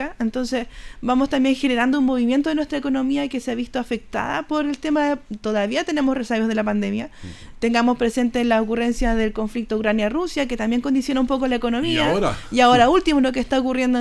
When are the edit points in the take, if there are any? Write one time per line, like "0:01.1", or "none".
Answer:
none